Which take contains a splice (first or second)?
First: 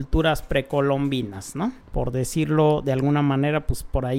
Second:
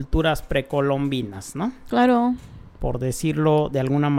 first